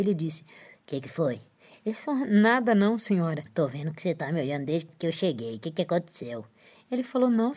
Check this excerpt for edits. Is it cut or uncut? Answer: cut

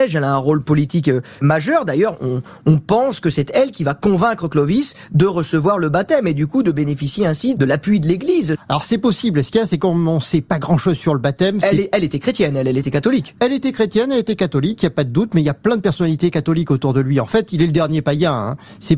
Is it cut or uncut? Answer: cut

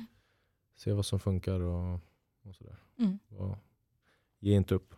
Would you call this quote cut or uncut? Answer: uncut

